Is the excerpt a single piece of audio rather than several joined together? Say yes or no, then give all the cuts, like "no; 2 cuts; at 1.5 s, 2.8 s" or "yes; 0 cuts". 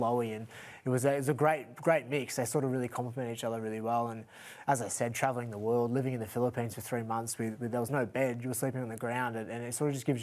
yes; 0 cuts